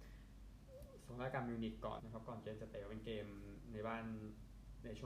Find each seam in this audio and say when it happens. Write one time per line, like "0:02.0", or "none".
0:02.0